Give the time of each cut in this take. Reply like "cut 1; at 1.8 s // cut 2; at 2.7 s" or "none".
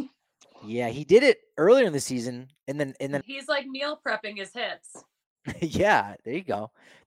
cut 1; at 3.2 s